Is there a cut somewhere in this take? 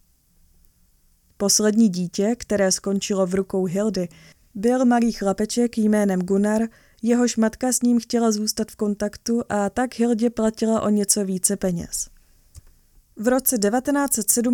no; 0 cuts

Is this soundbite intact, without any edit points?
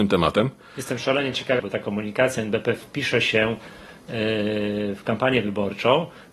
no; 1 cut; at 1.6 s

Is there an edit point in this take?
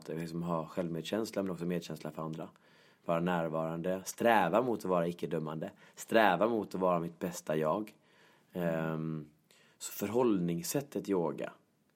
no; 0 cuts

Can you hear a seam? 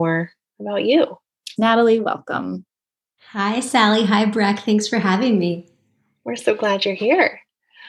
yes; 1 cut; at 1.6 s

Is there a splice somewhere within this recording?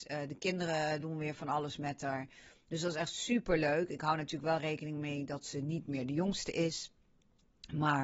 no; 0 cuts

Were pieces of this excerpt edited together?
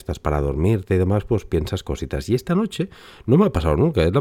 no; 0 cuts

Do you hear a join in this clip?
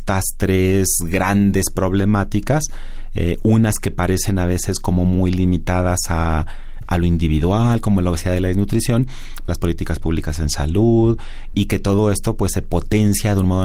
yes; 2 cuts; at 9.5 s, 11.5 s

